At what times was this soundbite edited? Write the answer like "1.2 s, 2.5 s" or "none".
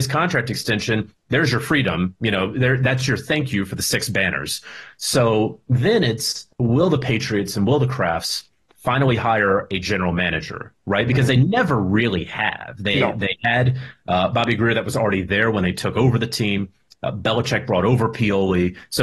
6.5 s